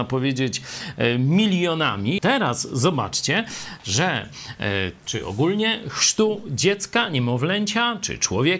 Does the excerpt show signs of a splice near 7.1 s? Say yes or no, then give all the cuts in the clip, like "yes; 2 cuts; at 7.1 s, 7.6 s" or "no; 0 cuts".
no; 2 cuts; at 2.2 s, 5.0 s